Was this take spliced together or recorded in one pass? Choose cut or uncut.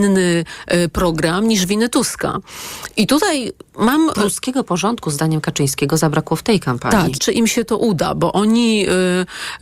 cut